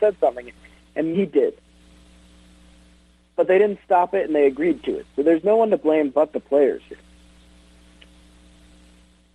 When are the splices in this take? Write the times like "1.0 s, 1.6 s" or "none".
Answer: 1.1 s